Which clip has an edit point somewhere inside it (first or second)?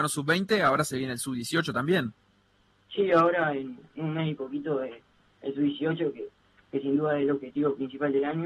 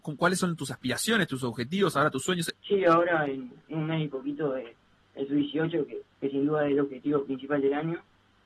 second